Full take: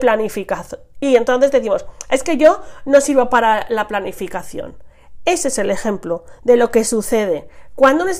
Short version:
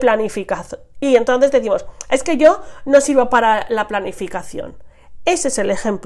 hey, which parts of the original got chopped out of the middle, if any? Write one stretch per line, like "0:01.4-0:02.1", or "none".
none